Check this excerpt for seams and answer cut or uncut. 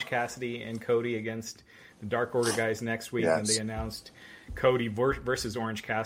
uncut